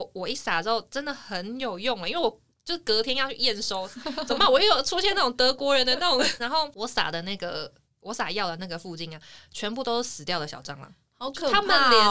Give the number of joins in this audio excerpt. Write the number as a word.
one